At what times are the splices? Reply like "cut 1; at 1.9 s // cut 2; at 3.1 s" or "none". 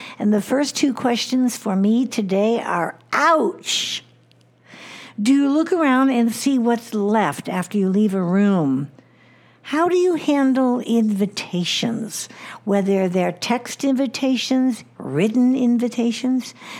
cut 1; at 14.9 s